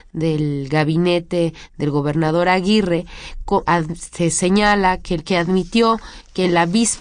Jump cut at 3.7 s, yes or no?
yes